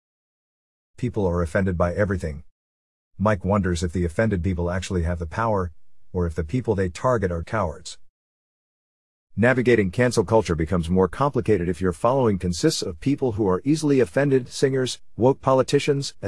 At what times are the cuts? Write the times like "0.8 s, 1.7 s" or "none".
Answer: 7.4 s